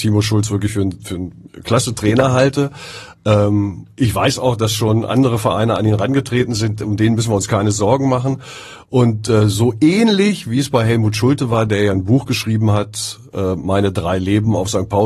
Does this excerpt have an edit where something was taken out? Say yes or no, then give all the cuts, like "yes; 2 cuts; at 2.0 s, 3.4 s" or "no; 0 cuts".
no; 0 cuts